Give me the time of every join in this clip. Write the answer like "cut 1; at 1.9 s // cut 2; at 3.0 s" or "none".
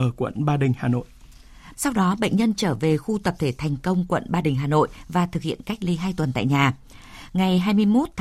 cut 1; at 1.7 s